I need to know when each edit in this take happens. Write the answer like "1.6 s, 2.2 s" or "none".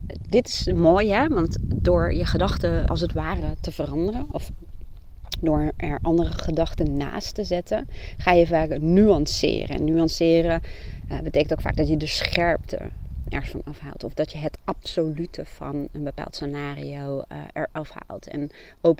2.9 s

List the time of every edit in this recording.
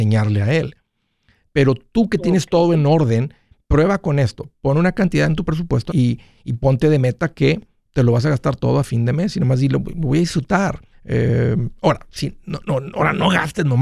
5.9 s, 10.9 s

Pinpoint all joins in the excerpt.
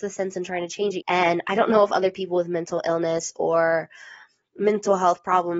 1.0 s

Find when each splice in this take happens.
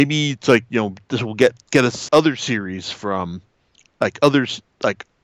2.1 s

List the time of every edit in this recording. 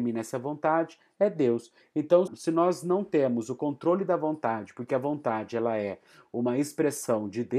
2.3 s

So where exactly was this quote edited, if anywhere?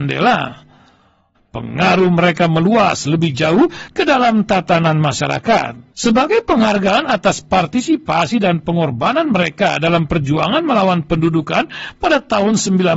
1.4 s, 5.9 s

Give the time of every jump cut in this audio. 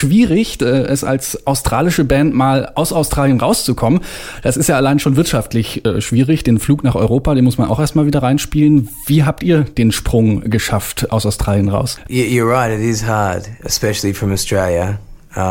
13.6 s

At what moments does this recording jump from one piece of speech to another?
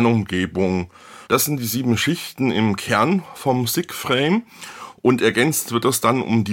1.3 s

